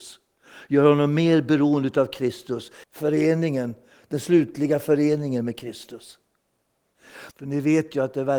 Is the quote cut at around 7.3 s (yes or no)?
yes